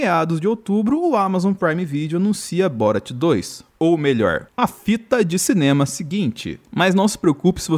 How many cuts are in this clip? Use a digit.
1